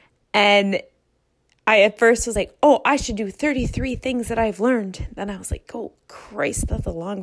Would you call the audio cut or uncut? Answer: uncut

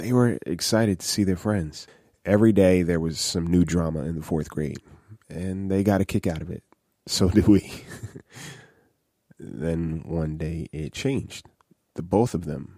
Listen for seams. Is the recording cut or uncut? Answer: uncut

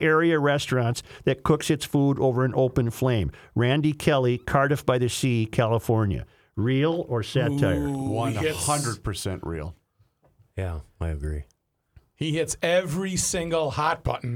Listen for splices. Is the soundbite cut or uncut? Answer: uncut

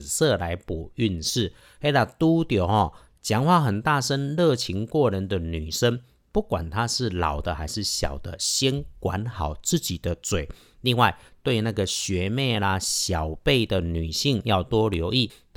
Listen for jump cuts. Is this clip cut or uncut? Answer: uncut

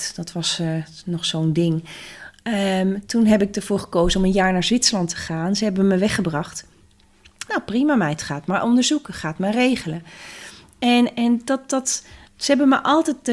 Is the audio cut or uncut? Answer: cut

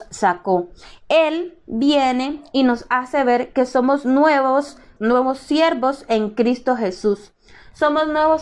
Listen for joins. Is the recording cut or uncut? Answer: cut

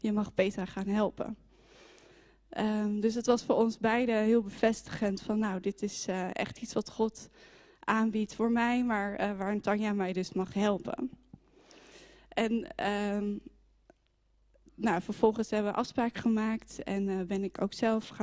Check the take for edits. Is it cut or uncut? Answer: uncut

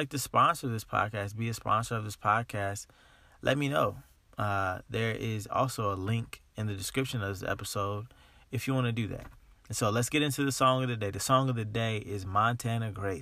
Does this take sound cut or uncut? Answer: uncut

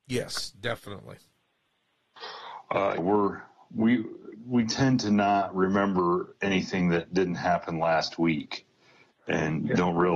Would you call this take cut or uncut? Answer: cut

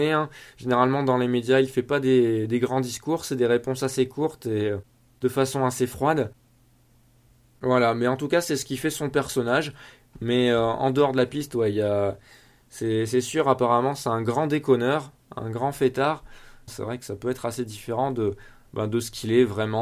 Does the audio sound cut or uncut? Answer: cut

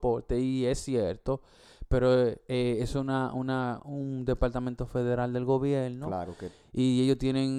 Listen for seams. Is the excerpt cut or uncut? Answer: cut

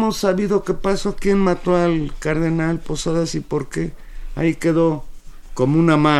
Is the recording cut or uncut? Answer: uncut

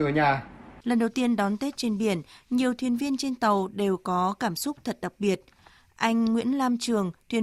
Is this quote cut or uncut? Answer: uncut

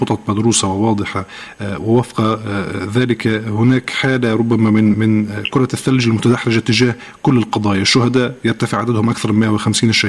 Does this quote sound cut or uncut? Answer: cut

